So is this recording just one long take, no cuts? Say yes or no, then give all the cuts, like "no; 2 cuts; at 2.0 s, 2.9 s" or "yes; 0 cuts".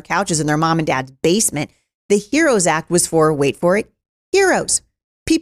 yes; 0 cuts